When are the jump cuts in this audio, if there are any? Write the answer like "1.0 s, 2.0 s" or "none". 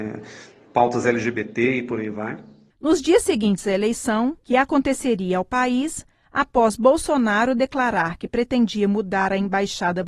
2.7 s, 4.4 s